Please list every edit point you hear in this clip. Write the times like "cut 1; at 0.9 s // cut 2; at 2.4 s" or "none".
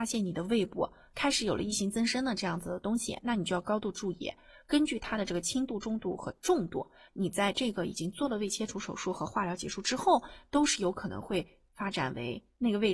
cut 1; at 7.1 s